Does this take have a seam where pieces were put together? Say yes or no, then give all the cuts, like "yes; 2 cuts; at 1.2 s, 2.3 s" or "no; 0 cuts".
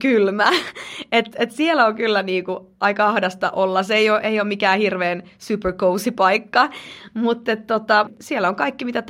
no; 0 cuts